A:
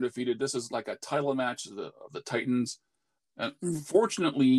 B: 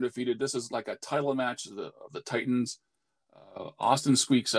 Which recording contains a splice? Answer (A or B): A